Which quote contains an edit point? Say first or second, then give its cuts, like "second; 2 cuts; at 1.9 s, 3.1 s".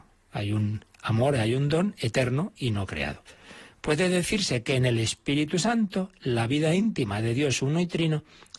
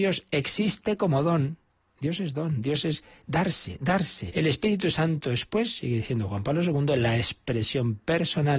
second; 1 cut; at 4.3 s